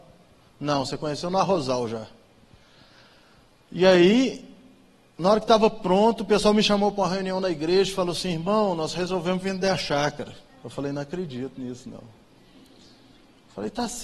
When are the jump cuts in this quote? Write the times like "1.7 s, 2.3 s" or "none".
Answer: none